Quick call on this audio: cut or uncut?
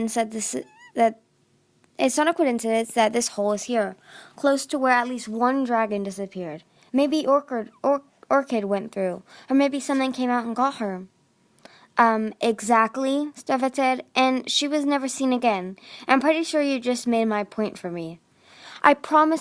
uncut